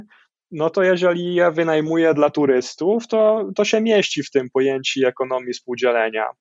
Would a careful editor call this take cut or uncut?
uncut